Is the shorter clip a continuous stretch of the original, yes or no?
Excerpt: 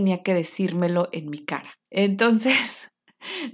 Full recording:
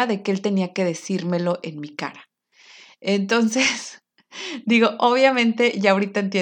no